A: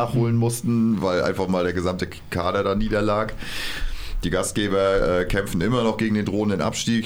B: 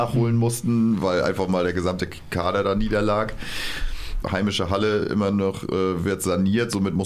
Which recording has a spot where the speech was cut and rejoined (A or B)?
B